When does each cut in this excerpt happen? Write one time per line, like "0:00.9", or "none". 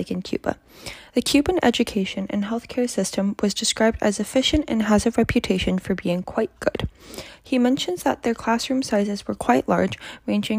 none